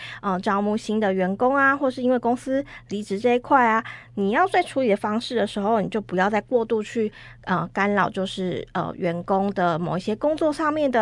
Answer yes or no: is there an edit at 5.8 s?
no